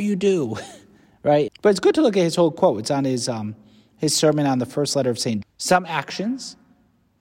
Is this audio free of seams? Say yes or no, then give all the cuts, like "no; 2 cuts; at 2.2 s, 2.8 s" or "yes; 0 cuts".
no; 2 cuts; at 1.5 s, 5.4 s